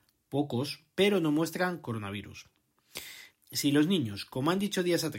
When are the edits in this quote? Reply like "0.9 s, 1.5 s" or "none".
3.3 s